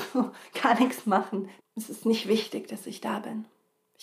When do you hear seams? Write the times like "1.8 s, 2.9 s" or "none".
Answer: 1.6 s